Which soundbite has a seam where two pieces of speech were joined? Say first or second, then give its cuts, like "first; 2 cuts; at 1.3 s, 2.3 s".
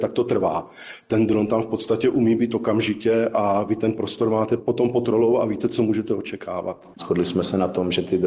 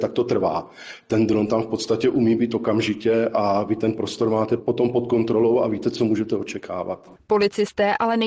first; 2 cuts; at 5.0 s, 7.0 s